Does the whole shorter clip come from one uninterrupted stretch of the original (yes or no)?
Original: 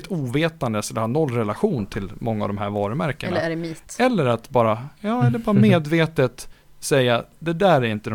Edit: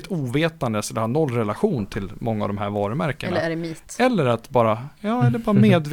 yes